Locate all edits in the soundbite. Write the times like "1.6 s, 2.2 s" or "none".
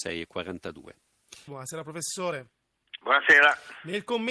1.5 s

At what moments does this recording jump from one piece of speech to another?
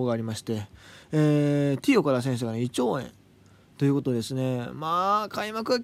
none

